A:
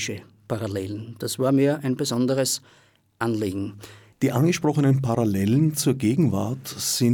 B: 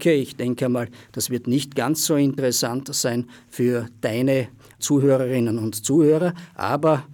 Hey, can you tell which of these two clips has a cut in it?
A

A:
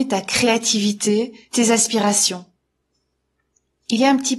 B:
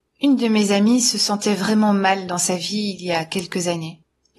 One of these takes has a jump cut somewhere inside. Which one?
A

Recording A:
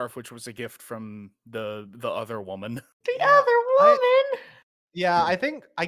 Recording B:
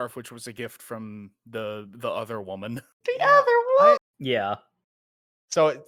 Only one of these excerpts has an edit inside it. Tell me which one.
B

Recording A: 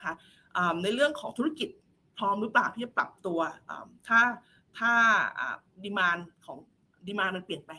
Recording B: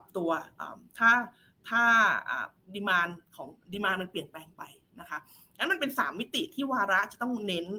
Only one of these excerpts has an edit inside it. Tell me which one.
B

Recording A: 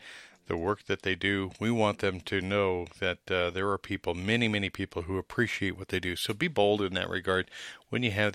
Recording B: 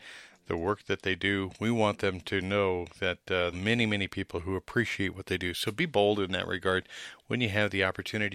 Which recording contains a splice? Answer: B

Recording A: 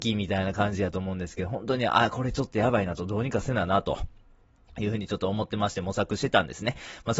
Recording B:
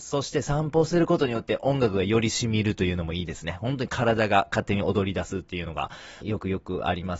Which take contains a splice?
B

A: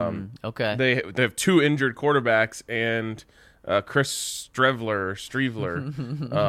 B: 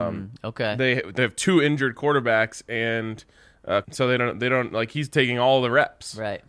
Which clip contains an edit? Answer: B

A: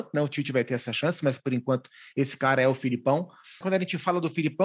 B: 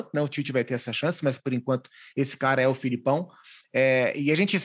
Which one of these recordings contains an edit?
A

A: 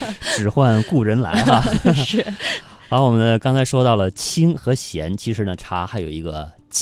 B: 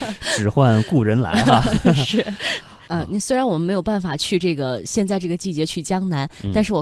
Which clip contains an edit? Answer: B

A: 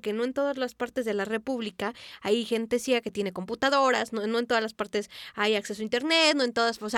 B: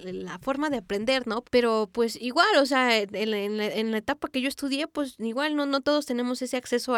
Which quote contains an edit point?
B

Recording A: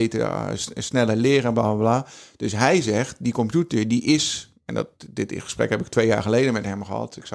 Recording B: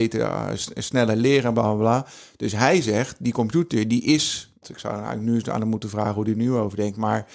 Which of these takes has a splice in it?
B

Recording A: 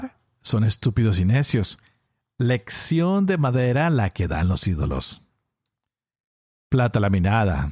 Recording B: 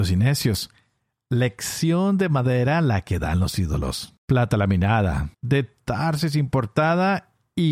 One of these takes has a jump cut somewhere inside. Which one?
B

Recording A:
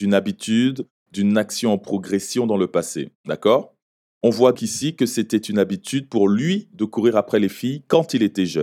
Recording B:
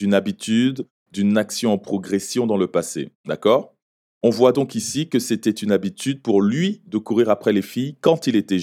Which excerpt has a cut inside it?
A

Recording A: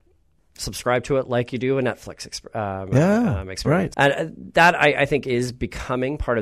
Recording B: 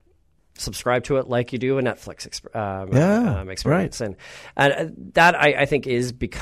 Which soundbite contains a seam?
A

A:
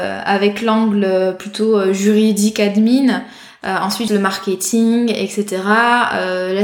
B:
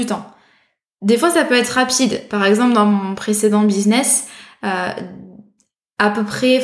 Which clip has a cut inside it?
A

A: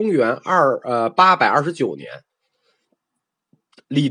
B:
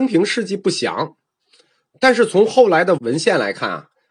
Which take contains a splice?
B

